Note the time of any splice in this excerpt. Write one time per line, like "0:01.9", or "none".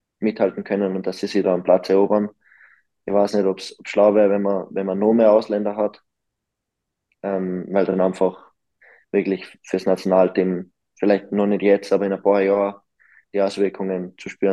none